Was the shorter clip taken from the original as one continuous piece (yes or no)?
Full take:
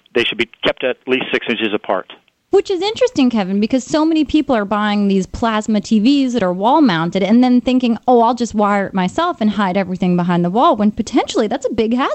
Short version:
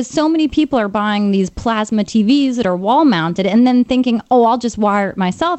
yes